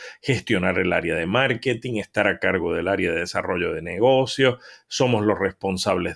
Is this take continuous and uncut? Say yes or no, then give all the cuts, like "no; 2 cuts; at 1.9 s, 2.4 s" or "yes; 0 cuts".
yes; 0 cuts